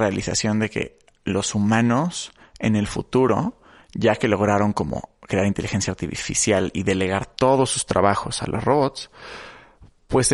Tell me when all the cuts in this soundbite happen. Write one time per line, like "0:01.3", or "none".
none